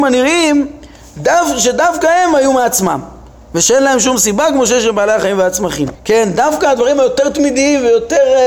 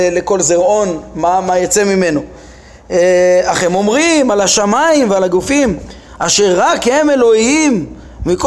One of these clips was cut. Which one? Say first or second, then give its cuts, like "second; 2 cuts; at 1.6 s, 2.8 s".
first; 1 cut; at 5.9 s